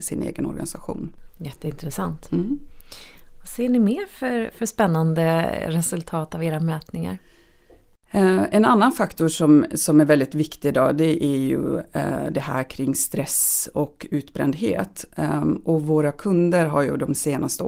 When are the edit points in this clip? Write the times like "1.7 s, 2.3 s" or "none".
1.3 s